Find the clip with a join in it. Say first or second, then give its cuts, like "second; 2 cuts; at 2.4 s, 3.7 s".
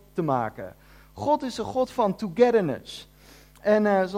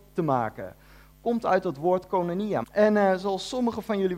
second; 2 cuts; at 1.1 s, 2.6 s